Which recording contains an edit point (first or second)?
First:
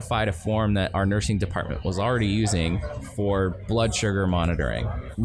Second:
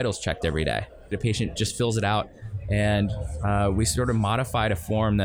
second